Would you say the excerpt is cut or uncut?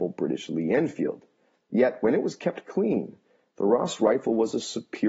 uncut